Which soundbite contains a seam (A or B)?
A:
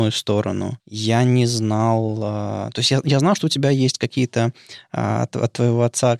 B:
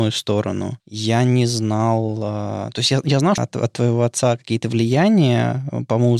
B